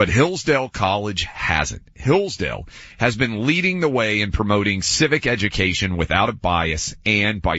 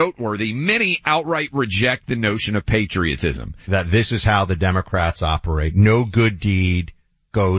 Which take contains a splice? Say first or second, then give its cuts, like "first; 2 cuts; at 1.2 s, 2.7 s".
second; 1 cut; at 3.6 s